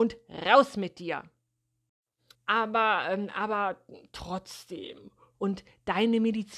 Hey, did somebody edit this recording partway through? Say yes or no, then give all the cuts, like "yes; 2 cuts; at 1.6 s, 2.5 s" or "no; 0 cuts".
yes; 2 cuts; at 2.3 s, 5.3 s